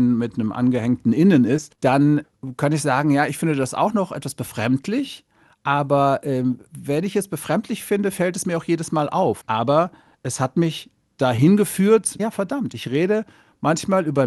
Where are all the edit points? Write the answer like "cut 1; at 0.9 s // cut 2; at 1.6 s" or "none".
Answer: cut 1; at 9.4 s // cut 2; at 12.2 s